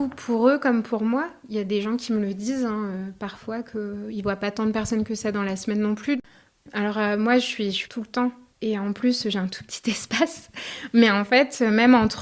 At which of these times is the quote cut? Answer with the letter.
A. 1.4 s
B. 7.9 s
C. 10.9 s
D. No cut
B